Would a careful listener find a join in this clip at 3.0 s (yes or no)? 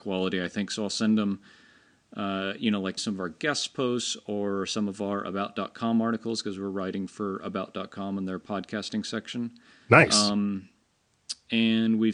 yes